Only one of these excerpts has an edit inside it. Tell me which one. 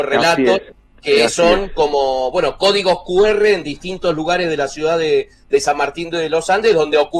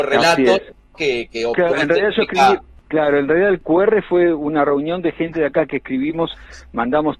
second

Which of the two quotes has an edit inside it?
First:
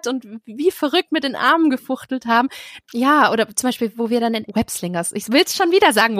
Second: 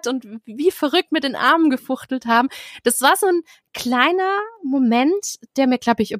first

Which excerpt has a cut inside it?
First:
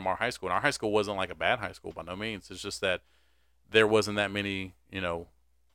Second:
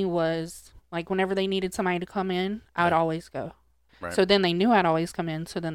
second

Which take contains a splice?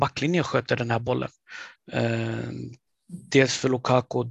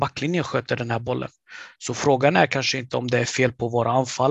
first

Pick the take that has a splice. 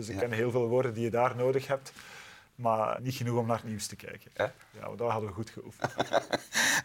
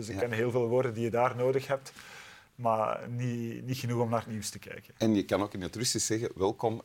first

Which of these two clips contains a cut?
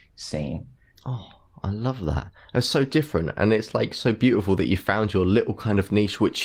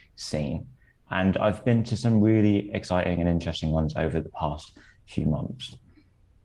first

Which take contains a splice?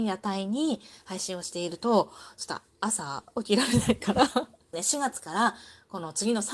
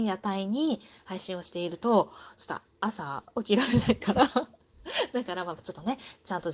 first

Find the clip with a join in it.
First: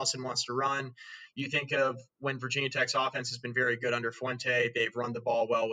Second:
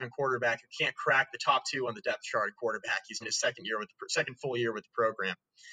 second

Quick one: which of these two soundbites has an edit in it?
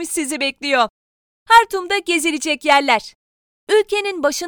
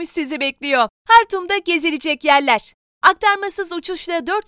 second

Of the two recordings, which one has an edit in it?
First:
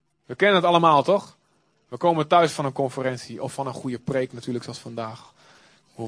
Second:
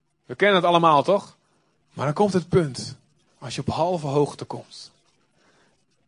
second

